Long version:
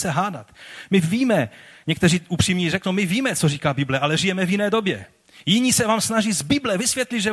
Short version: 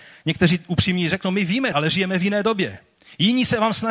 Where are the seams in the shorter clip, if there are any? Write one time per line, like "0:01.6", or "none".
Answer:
0:01.7